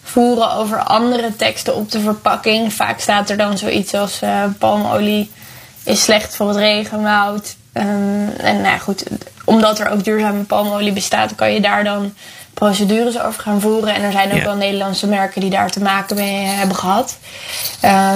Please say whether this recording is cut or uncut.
uncut